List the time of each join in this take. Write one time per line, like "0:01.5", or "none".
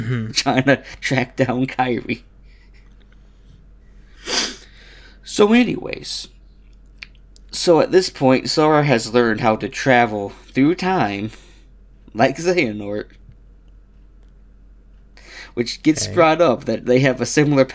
none